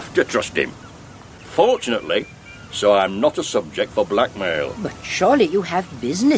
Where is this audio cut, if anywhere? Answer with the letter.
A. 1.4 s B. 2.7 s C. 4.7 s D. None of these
B